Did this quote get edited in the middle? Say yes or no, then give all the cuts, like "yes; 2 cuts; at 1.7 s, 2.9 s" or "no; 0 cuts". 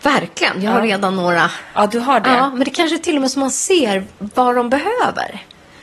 no; 0 cuts